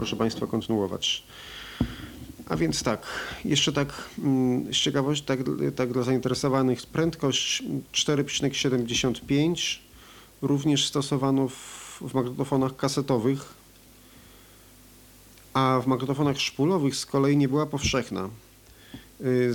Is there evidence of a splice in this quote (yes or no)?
no